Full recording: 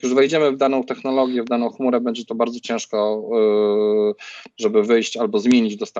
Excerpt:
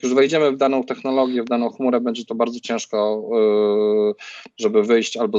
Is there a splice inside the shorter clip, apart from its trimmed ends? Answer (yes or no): no